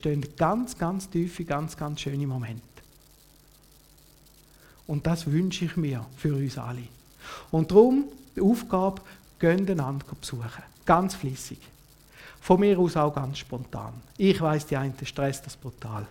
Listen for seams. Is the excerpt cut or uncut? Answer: cut